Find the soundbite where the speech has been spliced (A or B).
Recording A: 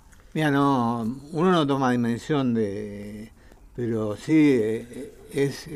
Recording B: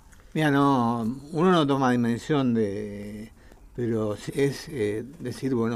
B